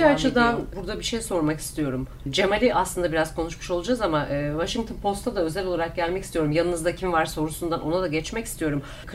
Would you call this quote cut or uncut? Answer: uncut